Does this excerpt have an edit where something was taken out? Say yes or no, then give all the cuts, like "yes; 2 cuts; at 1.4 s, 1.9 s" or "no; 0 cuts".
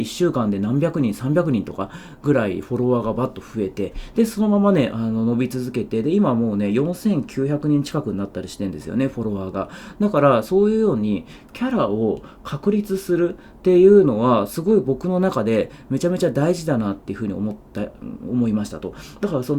no; 0 cuts